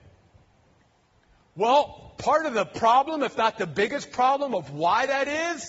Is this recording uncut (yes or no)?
yes